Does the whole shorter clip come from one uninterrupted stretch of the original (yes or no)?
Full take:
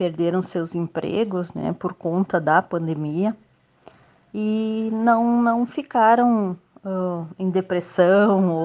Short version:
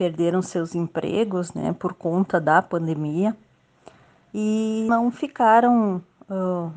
no